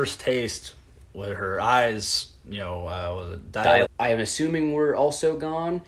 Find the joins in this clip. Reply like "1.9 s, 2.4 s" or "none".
3.8 s